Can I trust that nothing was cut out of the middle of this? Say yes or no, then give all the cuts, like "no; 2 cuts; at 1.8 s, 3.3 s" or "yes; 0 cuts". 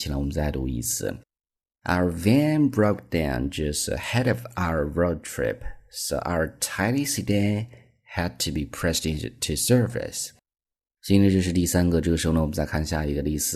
yes; 0 cuts